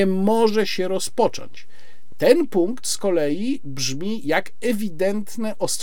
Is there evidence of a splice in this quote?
no; 0 cuts

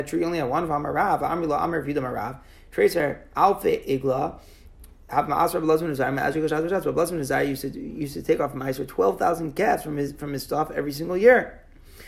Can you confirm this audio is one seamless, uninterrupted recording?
yes; 0 cuts

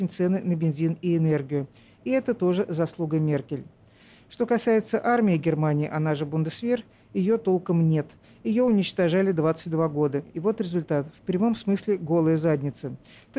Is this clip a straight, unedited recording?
yes; 0 cuts

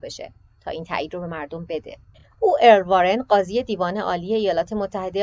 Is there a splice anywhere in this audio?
no; 0 cuts

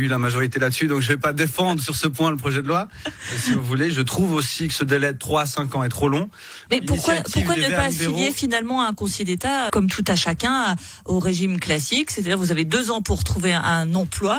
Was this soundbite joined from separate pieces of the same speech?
yes; 2 cuts; at 6.7 s, 9.7 s

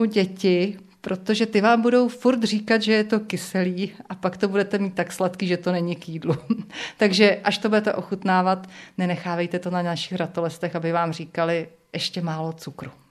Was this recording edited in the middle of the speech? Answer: no; 0 cuts

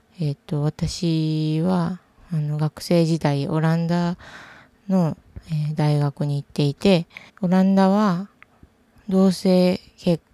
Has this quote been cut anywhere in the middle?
yes; 2 cuts; at 7.3 s, 8.5 s

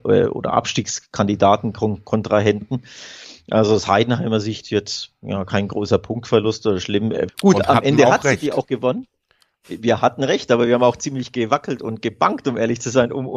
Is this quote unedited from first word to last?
no; 1 cut; at 7.3 s

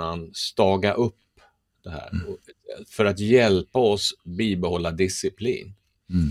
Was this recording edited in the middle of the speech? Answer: no; 0 cuts

